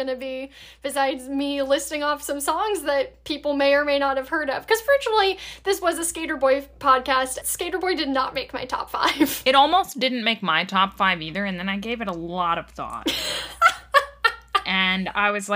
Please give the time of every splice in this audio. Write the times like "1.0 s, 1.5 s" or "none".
7.4 s